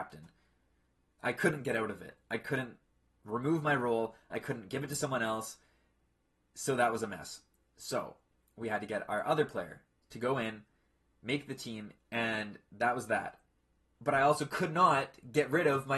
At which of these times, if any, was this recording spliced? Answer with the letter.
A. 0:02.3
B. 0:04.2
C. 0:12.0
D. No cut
C